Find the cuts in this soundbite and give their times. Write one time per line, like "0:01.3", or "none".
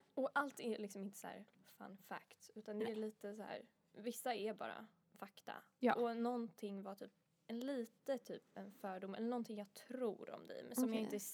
none